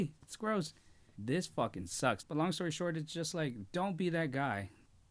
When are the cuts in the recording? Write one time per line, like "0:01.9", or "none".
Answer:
0:01.1
0:02.2